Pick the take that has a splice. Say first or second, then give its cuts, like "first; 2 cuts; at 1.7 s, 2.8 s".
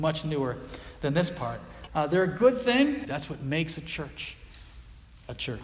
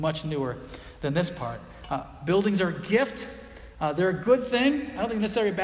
first; 2 cuts; at 1.9 s, 3.0 s